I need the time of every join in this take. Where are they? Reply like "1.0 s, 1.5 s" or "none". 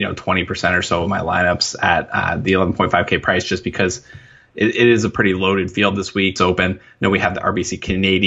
6.4 s